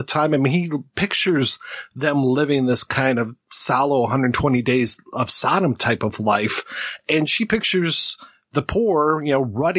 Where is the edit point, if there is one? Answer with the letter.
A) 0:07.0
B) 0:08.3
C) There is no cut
C